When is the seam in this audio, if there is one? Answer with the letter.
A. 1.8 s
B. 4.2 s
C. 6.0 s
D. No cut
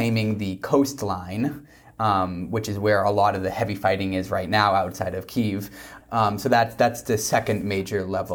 C